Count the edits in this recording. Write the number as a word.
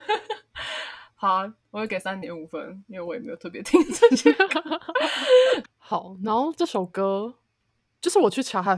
two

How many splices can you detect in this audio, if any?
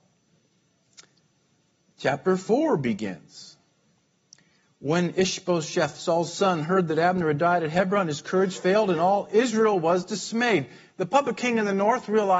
zero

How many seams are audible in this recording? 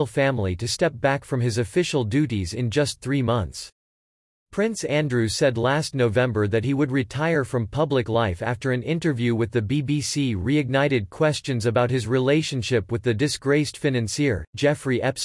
zero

